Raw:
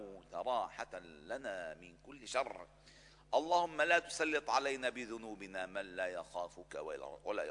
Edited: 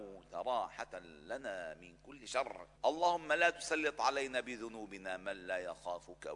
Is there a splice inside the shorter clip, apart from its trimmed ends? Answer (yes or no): yes